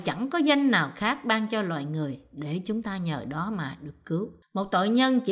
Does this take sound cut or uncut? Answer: cut